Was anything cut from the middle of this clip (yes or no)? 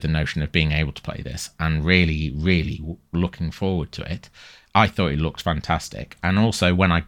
no